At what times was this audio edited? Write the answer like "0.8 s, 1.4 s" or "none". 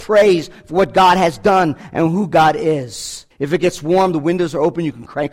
3.3 s